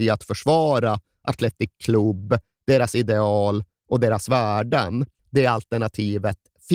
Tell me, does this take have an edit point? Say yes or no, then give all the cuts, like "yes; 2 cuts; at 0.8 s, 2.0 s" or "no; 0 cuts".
yes; 1 cut; at 5.2 s